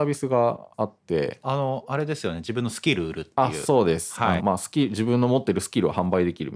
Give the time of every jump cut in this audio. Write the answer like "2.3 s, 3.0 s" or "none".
1.4 s, 4.4 s